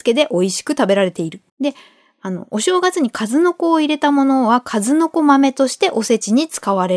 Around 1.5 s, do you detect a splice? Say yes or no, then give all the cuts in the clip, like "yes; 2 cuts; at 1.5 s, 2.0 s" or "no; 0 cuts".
yes; 1 cut; at 1.5 s